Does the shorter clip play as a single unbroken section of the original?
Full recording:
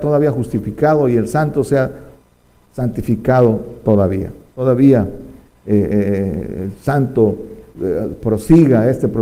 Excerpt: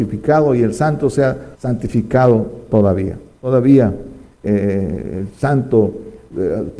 no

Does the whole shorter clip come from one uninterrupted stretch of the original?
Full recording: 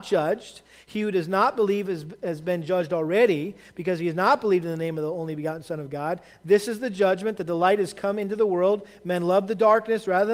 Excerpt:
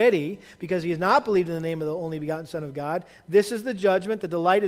yes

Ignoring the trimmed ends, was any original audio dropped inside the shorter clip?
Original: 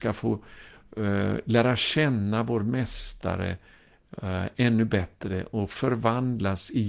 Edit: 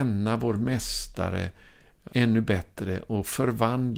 yes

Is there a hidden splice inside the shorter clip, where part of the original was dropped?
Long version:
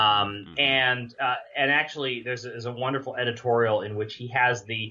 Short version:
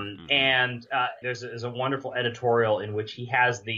yes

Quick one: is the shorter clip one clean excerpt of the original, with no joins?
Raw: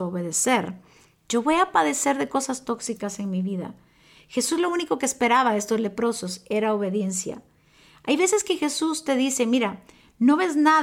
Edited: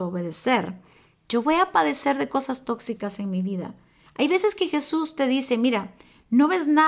no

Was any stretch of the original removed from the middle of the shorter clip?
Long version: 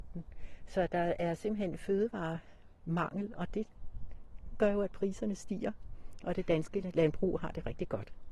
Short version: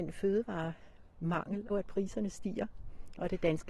yes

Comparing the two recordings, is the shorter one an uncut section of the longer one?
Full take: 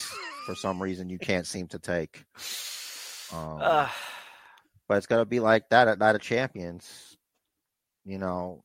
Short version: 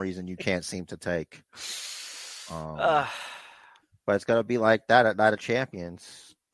yes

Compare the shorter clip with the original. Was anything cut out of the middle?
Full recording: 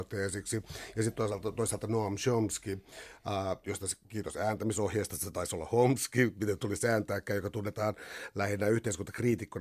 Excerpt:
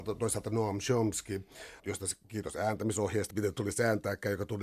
yes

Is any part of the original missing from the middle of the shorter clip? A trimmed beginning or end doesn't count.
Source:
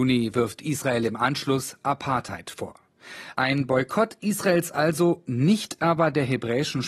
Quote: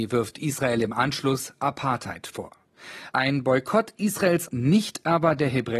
yes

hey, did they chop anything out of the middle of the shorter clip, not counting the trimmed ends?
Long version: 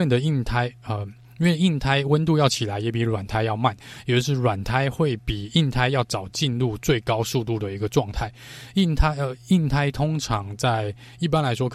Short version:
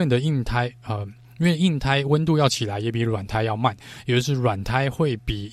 no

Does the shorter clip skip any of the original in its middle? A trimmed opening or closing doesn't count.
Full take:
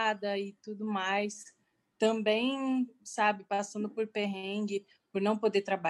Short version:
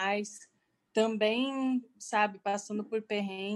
no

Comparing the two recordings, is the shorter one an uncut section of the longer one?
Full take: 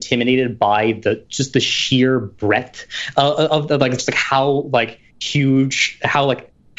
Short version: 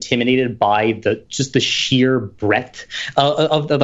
yes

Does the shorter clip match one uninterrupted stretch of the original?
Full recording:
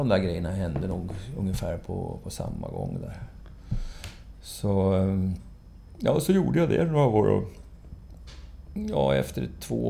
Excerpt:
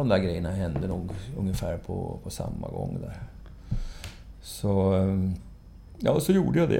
yes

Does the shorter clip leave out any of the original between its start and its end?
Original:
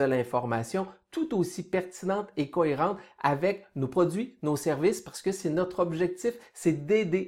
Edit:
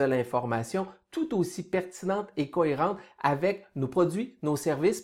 no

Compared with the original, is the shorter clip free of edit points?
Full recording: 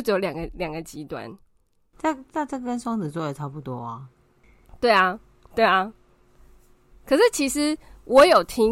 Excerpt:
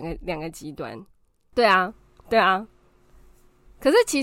no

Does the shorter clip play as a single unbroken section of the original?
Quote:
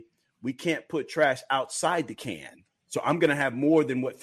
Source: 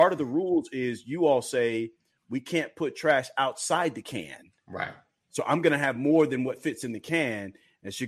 no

